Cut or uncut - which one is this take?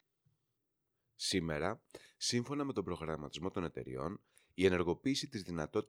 uncut